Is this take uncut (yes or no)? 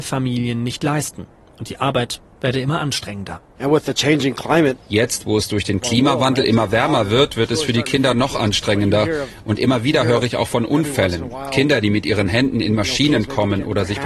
yes